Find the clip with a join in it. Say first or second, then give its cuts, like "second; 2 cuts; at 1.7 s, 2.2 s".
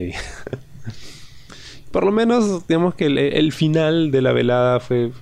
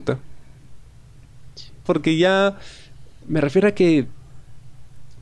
second; 2 cuts; at 1.9 s, 3.2 s